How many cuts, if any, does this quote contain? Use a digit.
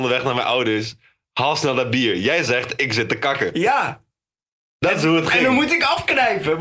0